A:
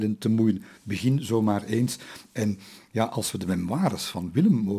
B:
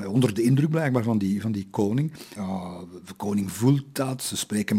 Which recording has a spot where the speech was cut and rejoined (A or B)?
B